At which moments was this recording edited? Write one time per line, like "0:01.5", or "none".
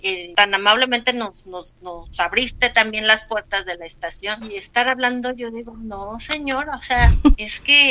none